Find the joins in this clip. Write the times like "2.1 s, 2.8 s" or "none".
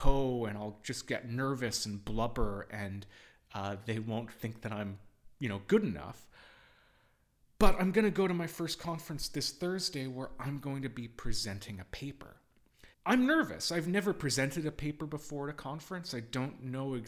12.9 s